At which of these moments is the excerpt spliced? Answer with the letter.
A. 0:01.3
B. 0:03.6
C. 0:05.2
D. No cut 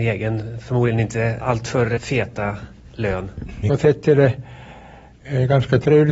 B